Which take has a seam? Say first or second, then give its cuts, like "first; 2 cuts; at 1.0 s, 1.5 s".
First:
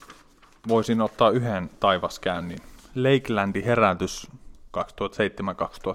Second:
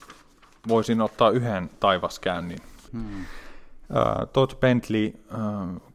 second; 1 cut; at 2.9 s